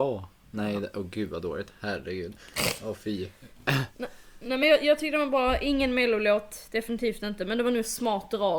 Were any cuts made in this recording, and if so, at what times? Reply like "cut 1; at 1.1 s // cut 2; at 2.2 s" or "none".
none